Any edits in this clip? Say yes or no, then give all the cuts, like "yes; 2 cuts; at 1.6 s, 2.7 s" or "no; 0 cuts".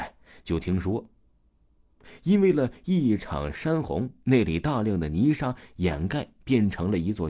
no; 0 cuts